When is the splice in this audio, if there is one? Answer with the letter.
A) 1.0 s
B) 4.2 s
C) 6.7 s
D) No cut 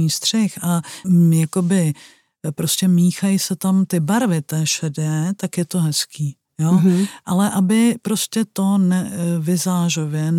A